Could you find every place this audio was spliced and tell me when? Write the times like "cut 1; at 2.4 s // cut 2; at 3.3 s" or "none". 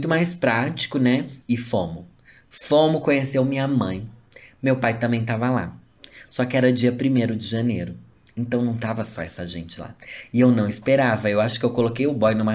none

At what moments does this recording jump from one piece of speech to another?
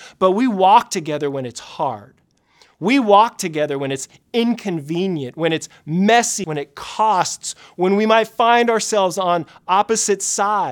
cut 1; at 6.4 s

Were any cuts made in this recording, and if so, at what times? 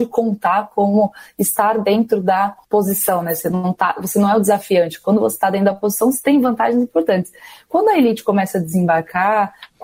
none

